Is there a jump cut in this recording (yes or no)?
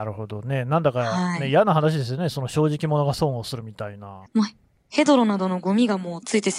yes